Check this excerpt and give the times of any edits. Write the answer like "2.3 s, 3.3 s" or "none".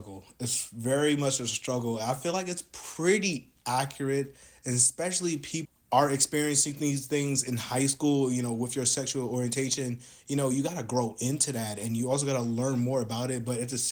none